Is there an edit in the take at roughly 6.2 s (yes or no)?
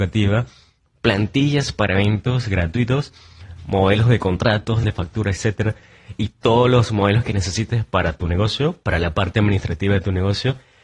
no